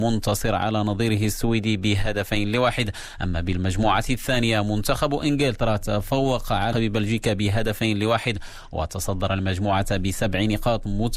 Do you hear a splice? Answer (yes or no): yes